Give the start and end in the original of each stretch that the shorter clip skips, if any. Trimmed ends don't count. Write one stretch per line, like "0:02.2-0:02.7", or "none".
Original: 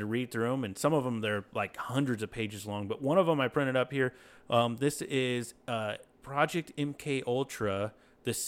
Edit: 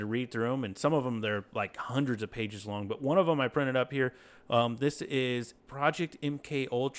0:05.6-0:06.1